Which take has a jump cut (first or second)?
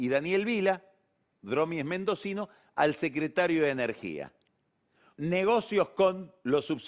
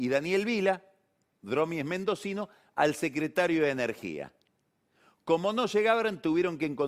first